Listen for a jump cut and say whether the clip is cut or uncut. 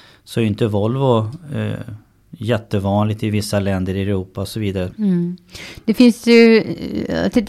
cut